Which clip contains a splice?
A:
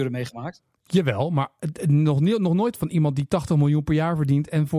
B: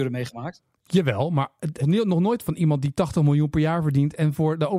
B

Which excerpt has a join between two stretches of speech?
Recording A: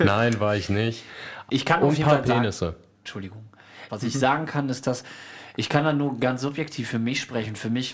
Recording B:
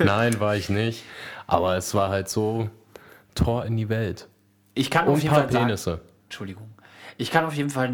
A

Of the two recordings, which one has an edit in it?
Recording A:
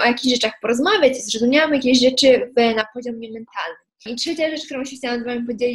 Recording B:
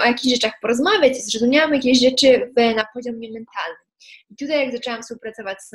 A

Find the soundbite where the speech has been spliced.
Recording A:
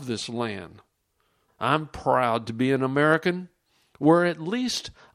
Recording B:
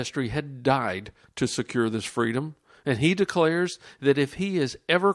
A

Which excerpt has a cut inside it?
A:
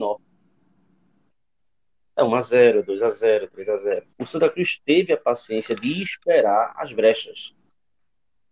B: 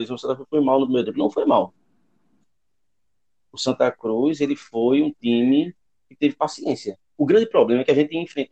A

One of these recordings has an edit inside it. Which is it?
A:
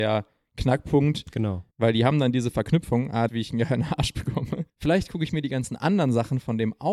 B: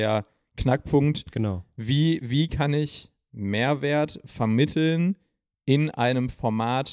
A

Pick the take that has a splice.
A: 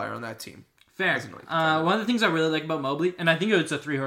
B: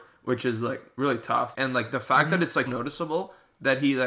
B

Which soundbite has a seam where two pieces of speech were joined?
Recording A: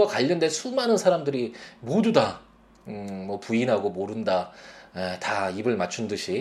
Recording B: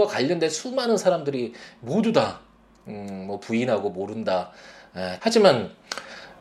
B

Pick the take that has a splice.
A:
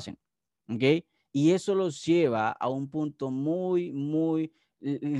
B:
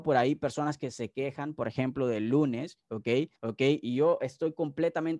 B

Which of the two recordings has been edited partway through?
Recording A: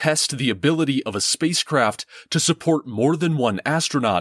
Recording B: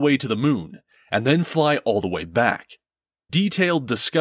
B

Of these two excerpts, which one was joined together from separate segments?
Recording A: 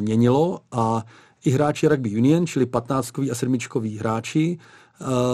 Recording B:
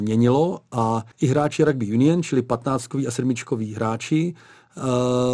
B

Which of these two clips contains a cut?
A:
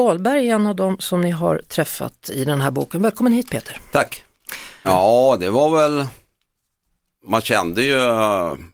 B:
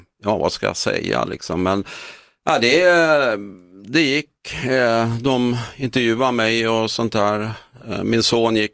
A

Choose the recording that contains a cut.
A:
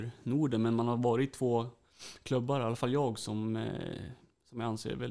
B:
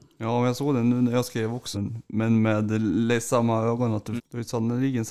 B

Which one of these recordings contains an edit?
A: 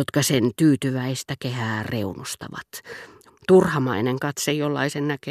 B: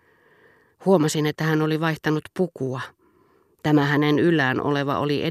A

